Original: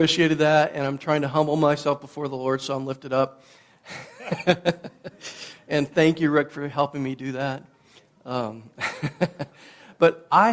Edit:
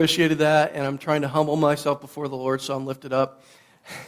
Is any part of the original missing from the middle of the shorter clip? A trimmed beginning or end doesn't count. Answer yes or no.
no